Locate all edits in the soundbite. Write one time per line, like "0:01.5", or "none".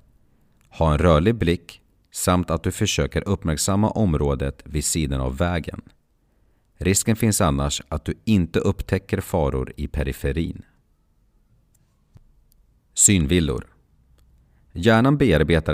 none